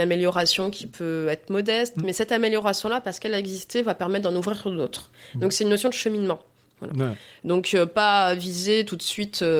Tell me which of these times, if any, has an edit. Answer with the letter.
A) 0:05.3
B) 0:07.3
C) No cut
C